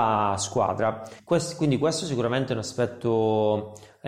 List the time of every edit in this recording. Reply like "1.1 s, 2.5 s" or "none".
1.2 s

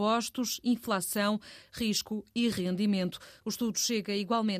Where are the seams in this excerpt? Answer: 1.6 s

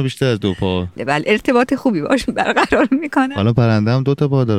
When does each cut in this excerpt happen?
1.0 s

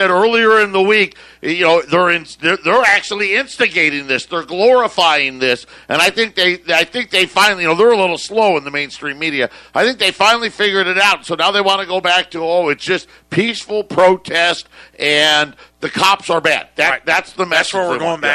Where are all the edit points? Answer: none

